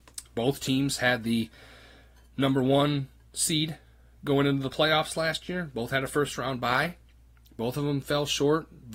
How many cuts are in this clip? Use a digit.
0